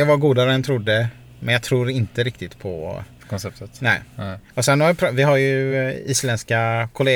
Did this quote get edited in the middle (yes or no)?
no